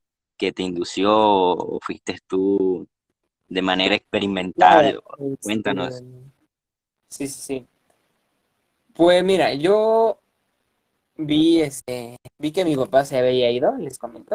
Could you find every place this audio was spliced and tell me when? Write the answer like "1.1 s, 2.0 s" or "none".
none

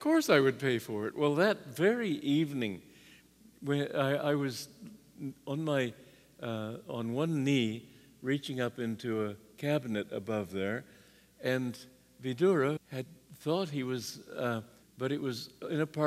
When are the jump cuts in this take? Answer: 12.8 s, 14.8 s

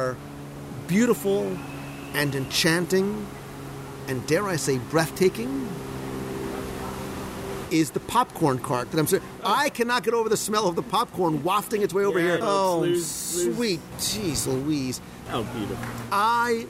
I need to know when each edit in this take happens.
12.4 s, 13.9 s, 15.3 s

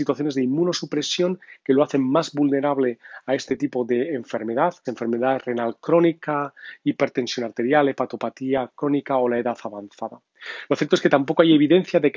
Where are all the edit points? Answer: 4.8 s, 10.7 s

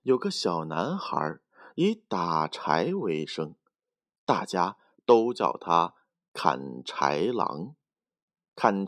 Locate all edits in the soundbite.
none

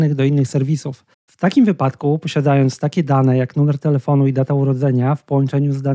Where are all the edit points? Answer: 1.1 s

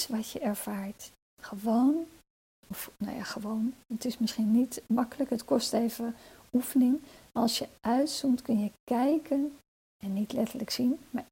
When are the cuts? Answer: 1.3 s

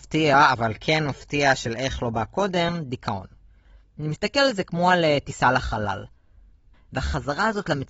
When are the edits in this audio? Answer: 6.7 s

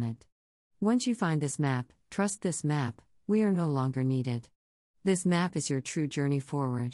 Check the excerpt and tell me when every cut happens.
3.2 s

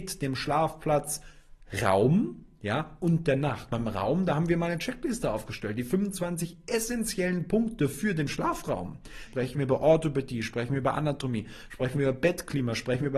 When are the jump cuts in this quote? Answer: 9.3 s

